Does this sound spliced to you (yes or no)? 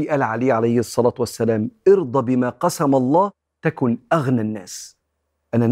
no